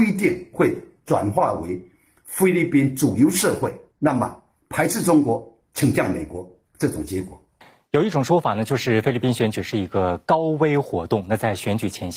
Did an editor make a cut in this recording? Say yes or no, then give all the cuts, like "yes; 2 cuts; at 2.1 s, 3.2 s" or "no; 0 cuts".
yes; 1 cut; at 3.9 s